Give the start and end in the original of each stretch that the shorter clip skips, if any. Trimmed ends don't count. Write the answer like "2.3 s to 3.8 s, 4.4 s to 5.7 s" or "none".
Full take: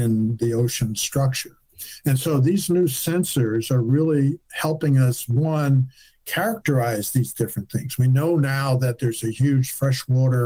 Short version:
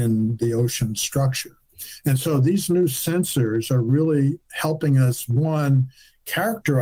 none